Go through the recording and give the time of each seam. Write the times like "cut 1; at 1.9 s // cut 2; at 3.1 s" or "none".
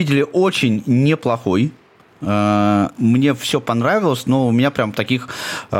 none